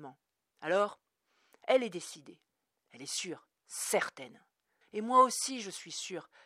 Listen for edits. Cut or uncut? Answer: cut